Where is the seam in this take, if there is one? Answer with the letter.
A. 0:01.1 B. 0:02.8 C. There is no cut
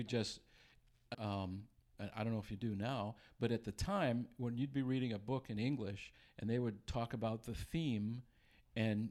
A